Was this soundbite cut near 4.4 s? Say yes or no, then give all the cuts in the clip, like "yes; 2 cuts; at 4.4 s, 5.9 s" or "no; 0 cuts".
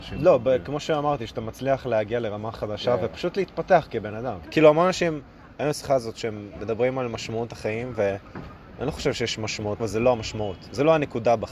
yes; 2 cuts; at 4.4 s, 9.8 s